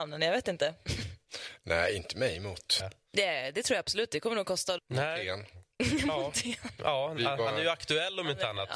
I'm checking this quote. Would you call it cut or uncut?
cut